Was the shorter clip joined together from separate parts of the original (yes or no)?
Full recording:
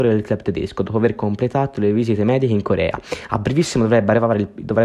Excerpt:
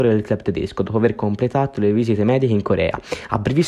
no